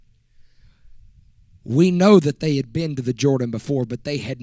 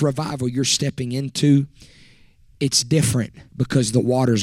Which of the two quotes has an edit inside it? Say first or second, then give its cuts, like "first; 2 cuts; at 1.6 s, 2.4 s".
second; 1 cut; at 3.5 s